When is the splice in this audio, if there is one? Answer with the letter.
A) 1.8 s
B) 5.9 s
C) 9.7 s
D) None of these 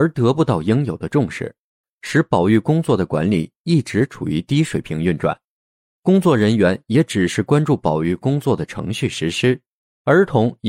A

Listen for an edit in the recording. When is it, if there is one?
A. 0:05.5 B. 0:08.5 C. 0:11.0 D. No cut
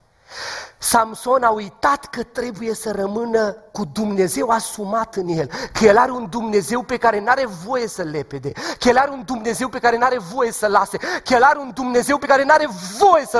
D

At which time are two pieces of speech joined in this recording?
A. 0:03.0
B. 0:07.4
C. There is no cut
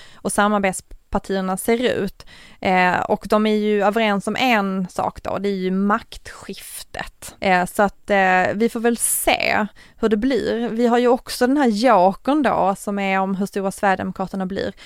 B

